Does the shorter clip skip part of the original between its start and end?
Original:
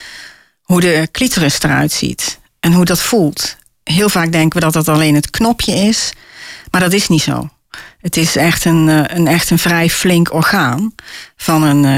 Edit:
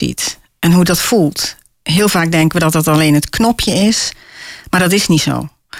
no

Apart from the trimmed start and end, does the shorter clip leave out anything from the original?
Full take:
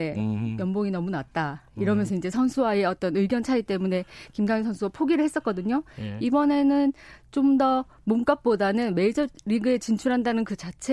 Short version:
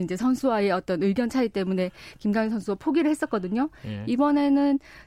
no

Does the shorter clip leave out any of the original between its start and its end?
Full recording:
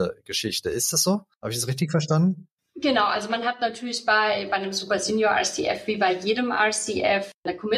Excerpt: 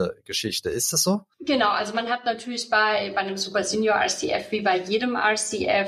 yes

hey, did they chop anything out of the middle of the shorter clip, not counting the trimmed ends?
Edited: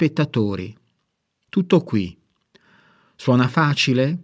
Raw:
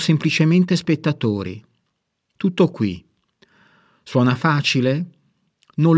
no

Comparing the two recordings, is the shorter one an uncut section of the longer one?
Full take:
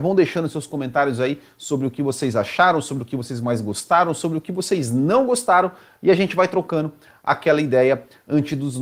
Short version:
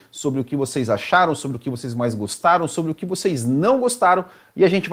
yes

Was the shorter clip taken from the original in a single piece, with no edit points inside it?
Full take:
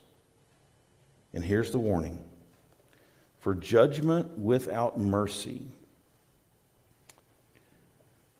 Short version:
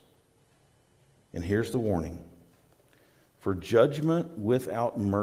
yes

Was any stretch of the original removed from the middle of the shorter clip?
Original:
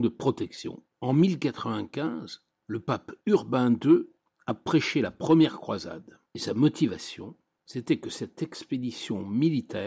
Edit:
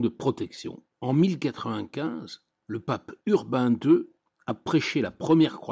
no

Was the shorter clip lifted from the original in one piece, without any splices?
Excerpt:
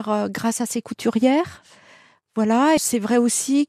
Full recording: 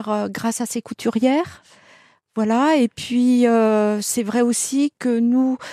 no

